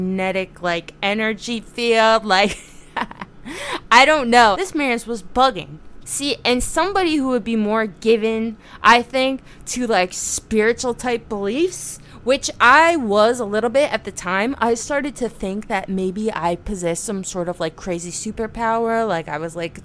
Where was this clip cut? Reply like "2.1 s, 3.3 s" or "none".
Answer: 4.5 s, 6.0 s